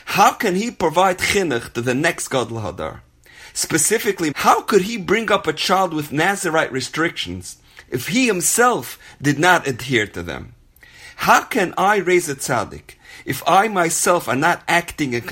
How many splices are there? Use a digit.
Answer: 1